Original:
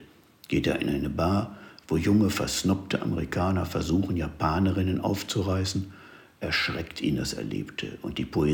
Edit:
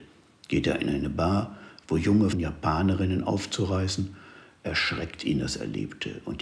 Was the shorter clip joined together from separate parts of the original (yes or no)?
yes